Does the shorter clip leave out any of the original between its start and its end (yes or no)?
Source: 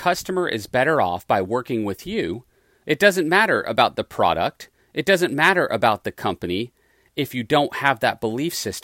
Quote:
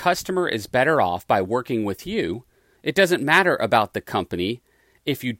yes